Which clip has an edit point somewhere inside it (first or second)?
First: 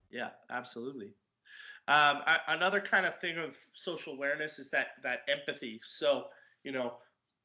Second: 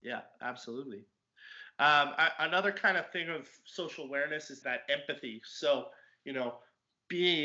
second